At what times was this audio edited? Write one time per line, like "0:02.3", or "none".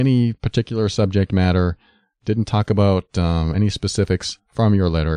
none